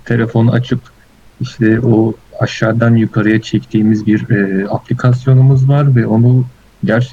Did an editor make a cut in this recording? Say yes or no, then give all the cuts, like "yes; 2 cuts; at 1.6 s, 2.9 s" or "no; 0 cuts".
no; 0 cuts